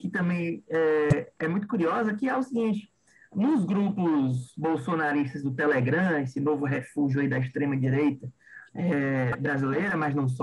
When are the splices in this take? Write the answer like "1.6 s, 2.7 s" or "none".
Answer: none